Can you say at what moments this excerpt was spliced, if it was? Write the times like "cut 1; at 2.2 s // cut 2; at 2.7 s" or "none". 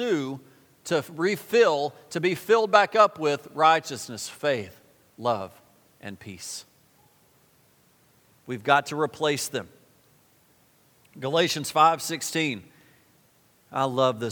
none